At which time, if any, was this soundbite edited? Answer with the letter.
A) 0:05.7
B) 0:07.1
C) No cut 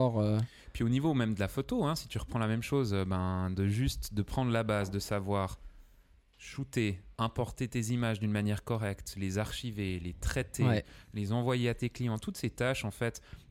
B